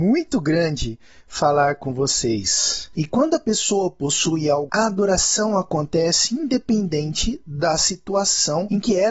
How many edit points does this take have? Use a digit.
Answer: 2